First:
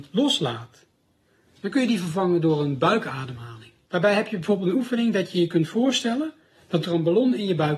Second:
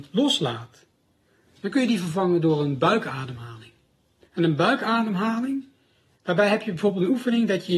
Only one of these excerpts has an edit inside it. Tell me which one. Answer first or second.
first